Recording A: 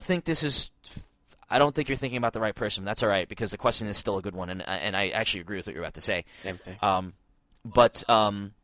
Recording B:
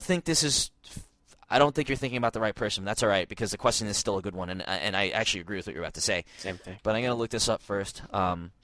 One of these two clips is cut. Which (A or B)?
B